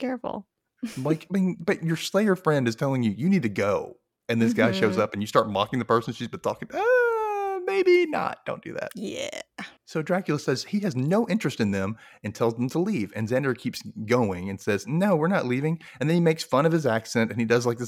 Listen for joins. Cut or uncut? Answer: cut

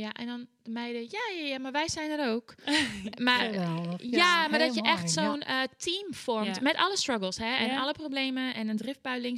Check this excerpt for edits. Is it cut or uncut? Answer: uncut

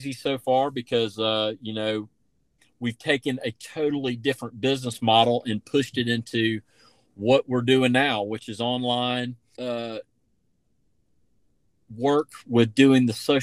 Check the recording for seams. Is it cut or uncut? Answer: cut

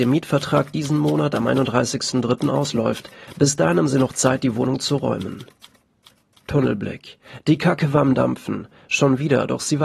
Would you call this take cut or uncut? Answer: uncut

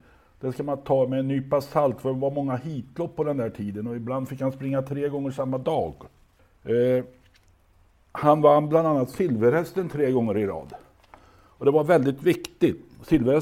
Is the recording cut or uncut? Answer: uncut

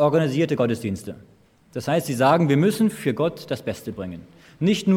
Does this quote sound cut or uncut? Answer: uncut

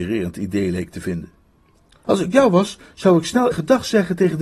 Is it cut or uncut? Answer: cut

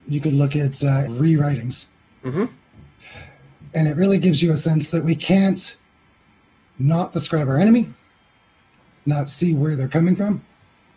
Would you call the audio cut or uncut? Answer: cut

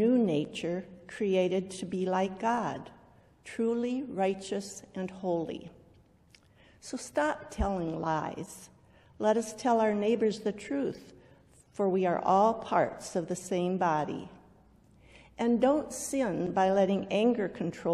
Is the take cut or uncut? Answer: uncut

